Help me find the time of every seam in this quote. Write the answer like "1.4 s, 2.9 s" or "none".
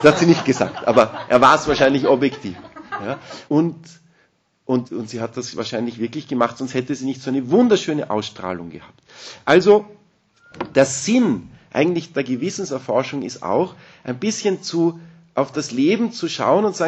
3.5 s, 4.9 s